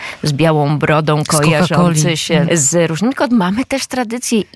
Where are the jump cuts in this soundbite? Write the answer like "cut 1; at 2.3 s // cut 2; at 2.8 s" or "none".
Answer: cut 1; at 2.5 s